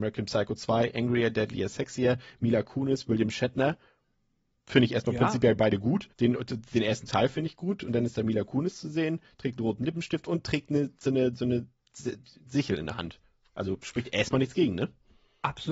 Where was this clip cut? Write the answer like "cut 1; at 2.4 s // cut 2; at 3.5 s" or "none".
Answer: cut 1; at 6.1 s